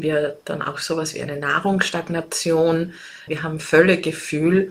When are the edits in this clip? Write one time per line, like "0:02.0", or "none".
0:03.3